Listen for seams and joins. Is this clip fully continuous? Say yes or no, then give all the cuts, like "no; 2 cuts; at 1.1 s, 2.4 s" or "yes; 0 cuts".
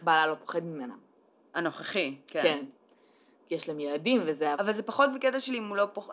no; 1 cut; at 4.5 s